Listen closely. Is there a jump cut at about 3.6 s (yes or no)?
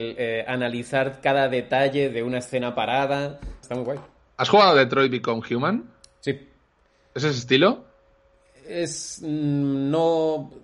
yes